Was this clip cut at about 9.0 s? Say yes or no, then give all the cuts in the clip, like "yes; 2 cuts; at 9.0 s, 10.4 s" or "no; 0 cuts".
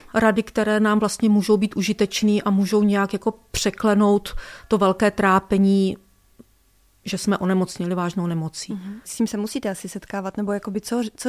yes; 1 cut; at 9.0 s